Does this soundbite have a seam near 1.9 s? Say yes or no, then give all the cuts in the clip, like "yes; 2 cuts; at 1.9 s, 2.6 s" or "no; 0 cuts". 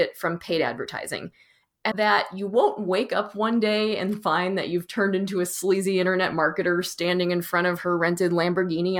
yes; 1 cut; at 1.9 s